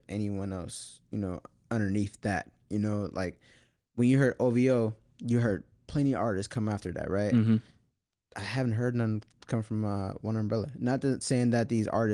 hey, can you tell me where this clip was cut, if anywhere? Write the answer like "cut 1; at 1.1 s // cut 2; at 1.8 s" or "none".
none